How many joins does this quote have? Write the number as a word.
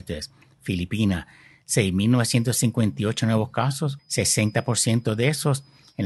one